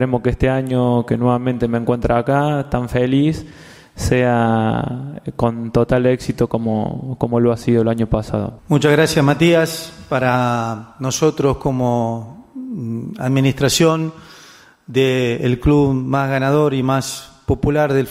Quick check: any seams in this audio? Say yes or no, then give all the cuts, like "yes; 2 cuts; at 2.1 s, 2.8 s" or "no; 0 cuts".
yes; 1 cut; at 8.6 s